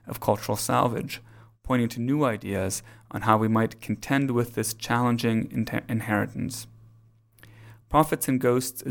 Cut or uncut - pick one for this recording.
uncut